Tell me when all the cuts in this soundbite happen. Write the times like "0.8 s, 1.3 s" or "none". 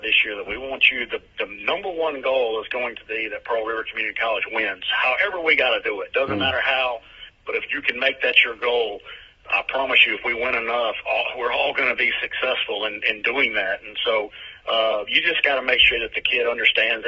none